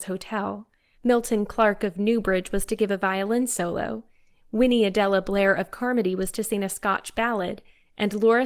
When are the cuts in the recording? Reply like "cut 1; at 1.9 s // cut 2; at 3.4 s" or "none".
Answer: cut 1; at 0.9 s